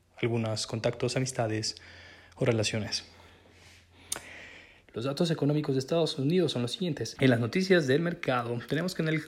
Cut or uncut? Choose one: cut